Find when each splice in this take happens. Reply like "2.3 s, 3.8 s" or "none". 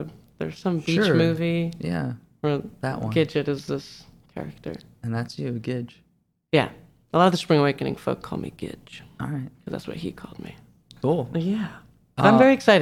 none

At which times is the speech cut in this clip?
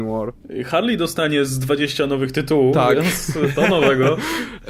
none

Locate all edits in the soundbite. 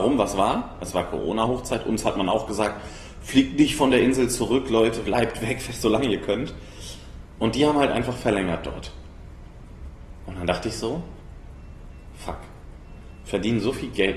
5.0 s

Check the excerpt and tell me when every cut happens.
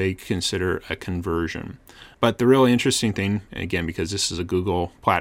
2.1 s

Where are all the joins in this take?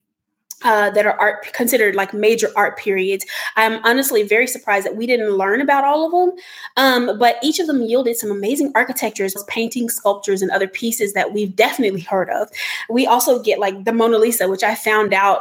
9.4 s

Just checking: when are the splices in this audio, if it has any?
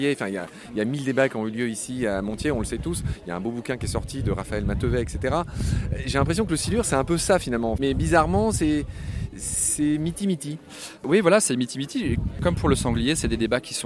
none

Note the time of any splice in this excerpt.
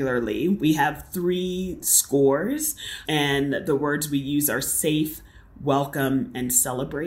3.0 s

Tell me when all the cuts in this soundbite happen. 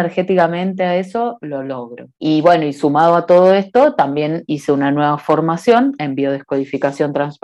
2.1 s

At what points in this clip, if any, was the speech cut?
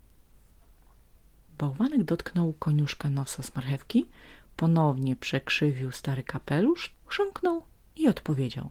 6.9 s

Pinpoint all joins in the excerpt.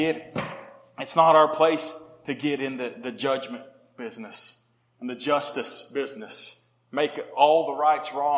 none

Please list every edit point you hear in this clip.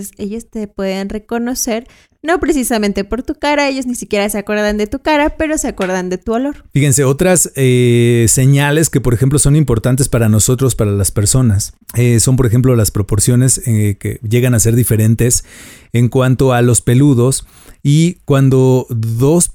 none

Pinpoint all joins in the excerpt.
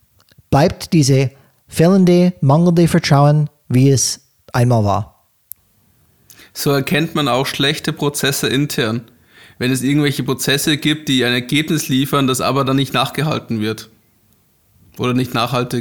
none

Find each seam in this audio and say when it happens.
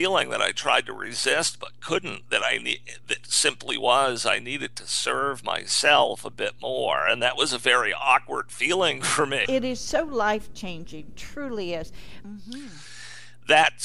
9.4 s, 12.2 s

